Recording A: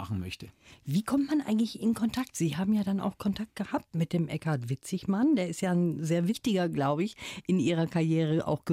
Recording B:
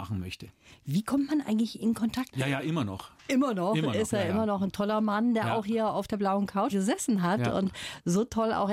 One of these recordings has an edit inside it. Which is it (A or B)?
B